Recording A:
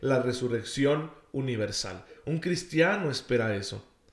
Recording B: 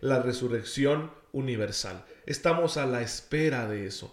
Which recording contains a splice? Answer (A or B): A